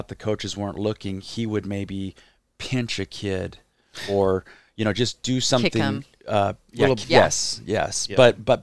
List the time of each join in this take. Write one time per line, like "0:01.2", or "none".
0:07.0